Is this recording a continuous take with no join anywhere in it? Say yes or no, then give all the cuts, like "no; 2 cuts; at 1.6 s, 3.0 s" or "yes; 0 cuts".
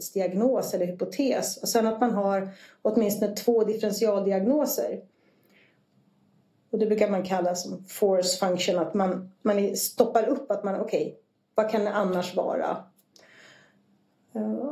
yes; 0 cuts